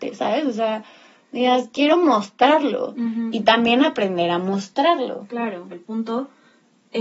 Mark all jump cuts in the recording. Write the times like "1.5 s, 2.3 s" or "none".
5.7 s